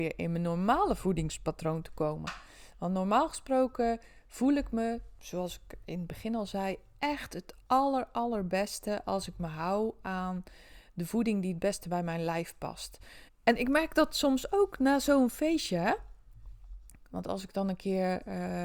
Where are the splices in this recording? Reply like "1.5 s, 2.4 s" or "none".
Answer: 13.3 s

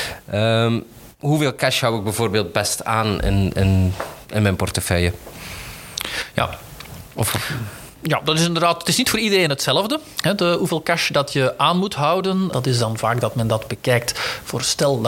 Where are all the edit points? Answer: 12.5 s

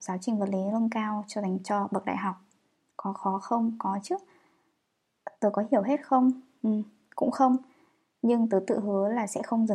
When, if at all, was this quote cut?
none

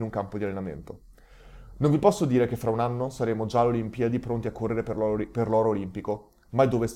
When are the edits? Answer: none

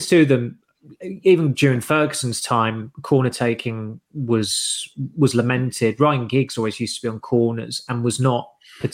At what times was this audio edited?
none

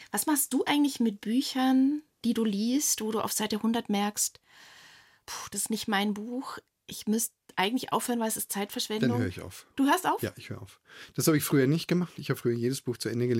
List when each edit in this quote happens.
none

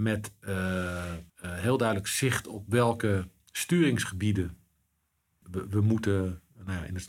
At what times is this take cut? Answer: 1.3 s, 5.4 s

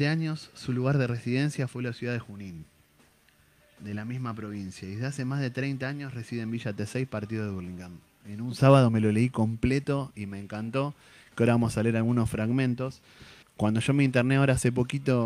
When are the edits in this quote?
8.2 s, 13.4 s

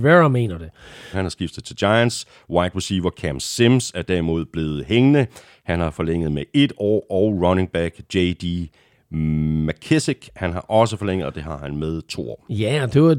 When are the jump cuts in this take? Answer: 1.1 s

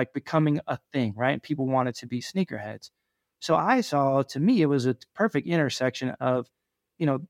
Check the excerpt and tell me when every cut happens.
none

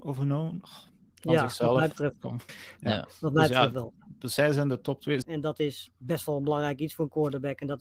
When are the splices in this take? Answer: 2.5 s, 5.2 s

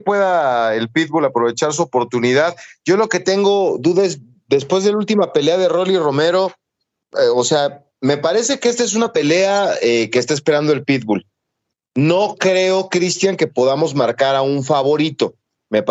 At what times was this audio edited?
none

